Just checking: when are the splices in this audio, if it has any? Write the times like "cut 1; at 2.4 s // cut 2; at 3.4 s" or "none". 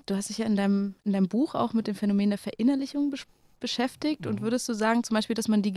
none